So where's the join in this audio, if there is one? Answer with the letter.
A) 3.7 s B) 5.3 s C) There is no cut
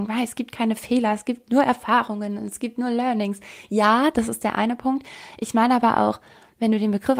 C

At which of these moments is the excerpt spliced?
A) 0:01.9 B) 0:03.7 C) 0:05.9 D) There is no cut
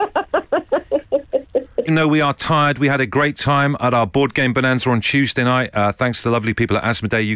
A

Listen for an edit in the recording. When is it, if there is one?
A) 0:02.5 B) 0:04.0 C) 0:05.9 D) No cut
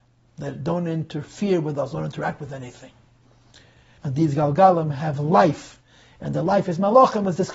B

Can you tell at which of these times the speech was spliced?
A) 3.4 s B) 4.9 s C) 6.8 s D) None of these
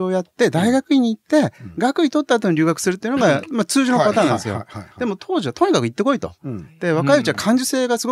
D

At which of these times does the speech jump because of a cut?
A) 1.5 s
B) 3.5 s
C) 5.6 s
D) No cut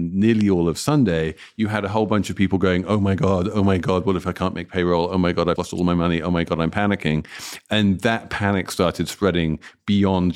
C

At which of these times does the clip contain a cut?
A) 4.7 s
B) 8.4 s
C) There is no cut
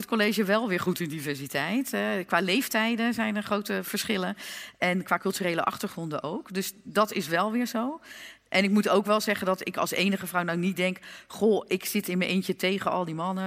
C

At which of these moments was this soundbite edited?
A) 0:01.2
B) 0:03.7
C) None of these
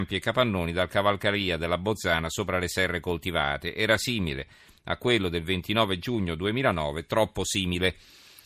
C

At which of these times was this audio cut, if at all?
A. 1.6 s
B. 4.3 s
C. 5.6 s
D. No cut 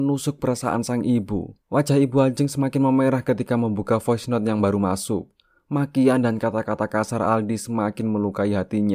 A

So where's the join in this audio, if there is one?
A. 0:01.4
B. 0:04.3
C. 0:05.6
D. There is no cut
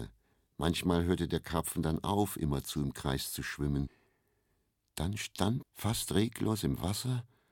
C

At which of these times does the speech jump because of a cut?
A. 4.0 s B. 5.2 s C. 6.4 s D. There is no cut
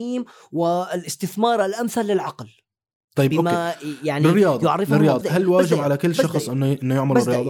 B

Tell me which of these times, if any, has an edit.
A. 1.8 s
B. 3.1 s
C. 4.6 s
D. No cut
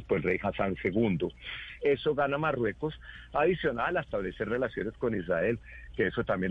A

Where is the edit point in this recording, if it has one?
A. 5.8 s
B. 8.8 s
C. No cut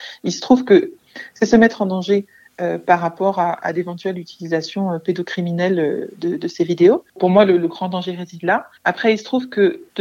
B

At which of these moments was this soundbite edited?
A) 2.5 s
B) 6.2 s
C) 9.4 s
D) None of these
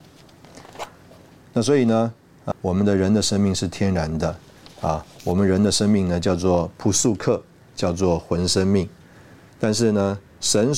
A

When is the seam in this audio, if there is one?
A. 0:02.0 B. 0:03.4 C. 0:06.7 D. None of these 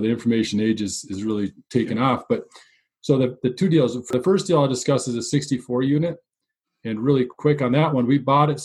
D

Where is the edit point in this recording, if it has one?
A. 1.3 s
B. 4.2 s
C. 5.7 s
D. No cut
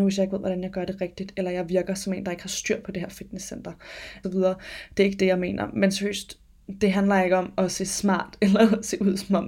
B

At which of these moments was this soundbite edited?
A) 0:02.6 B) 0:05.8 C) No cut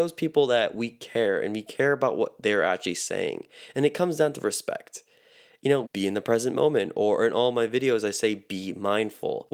B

